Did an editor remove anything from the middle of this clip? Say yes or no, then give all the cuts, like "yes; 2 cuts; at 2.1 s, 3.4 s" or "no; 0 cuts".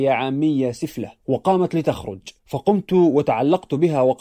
yes; 2 cuts; at 1.2 s, 2.4 s